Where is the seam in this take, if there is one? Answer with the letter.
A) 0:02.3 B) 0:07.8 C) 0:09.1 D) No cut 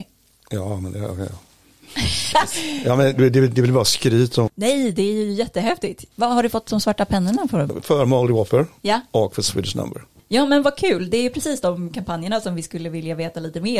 A